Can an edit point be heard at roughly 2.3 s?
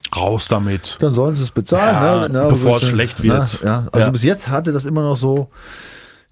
yes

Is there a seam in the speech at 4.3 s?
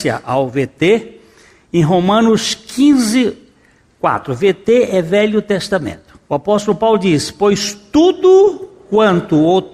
no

